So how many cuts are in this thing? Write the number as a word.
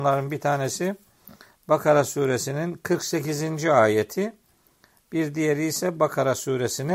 zero